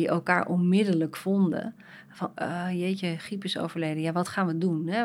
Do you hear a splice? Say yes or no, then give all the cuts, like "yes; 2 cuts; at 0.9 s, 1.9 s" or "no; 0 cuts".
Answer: yes; 1 cut; at 2.4 s